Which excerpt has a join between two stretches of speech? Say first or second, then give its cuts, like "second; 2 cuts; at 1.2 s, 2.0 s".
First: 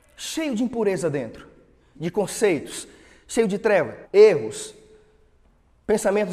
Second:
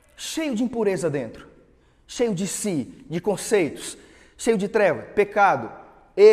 first; 2 cuts; at 1.9 s, 4.0 s